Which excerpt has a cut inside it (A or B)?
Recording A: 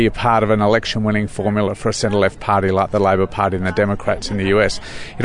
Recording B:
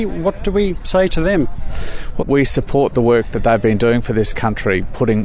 B